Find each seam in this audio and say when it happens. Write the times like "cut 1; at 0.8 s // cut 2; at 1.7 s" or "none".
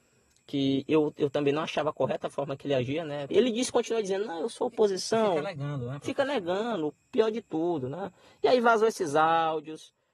cut 1; at 3.3 s